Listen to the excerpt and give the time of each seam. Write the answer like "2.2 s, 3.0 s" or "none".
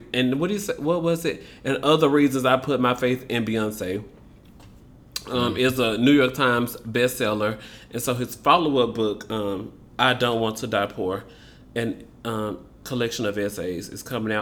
none